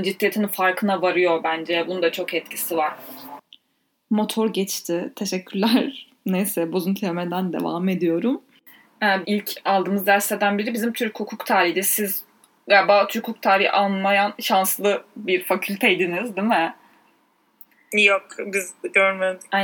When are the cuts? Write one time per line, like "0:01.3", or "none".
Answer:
0:09.2